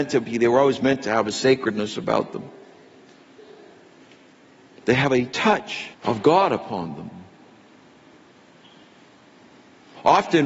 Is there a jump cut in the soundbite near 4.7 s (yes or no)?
yes